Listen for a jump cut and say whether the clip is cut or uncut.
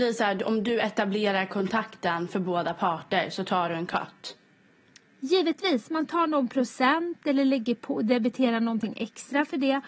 uncut